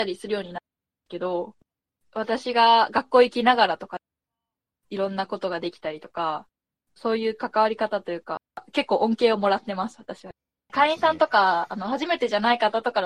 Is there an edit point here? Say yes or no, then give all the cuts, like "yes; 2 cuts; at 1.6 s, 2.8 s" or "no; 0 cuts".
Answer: yes; 1 cut; at 10.7 s